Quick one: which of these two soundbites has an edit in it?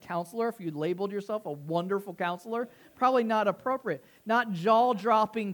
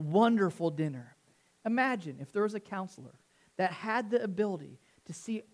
second; 1 cut; at 1.6 s

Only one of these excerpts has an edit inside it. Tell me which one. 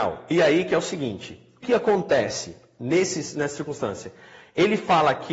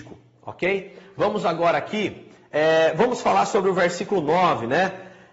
first; 1 cut; at 1.6 s

